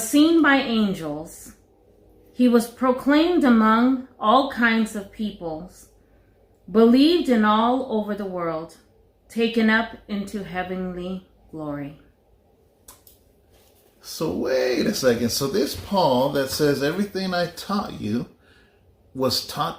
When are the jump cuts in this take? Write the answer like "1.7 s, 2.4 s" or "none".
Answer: none